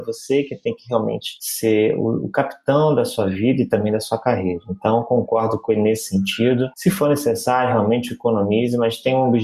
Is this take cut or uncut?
uncut